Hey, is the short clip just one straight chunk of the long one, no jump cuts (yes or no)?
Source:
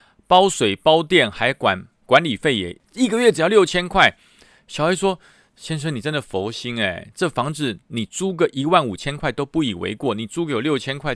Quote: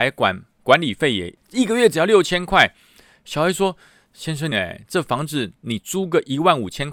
no